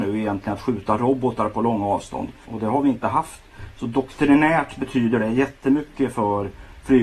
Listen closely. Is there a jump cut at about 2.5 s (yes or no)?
yes